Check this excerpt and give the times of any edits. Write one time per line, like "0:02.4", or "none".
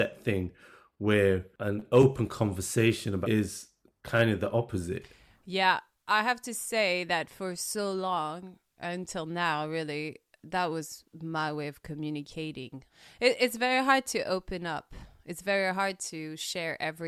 none